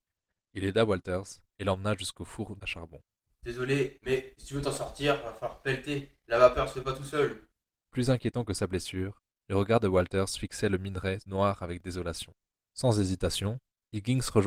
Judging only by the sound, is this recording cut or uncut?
uncut